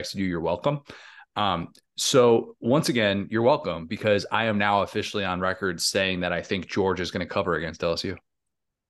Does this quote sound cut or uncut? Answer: uncut